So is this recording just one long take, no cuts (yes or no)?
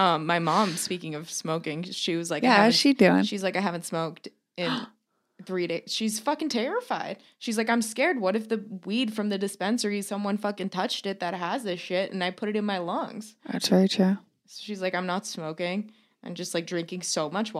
yes